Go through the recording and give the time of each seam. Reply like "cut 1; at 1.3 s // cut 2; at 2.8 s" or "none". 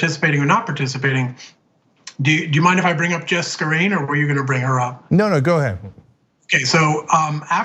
none